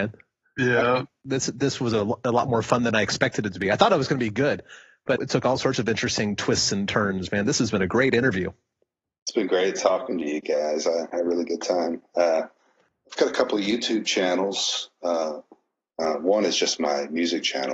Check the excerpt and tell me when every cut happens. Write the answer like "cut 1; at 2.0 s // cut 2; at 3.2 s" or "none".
cut 1; at 5.2 s // cut 2; at 11.1 s